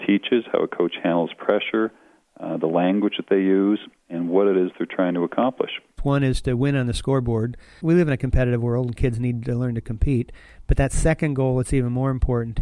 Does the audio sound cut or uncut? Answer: cut